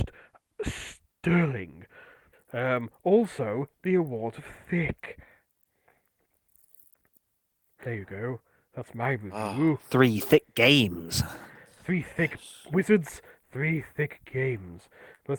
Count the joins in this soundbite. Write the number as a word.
one